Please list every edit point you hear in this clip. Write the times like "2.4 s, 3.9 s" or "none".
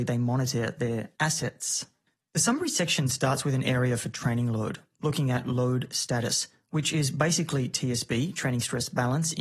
none